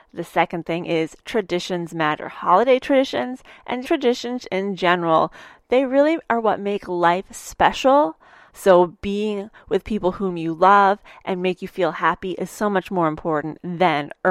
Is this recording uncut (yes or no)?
no